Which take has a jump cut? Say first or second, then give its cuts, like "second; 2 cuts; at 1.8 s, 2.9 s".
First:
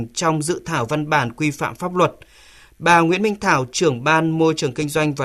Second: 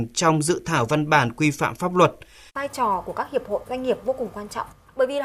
second; 1 cut; at 2.5 s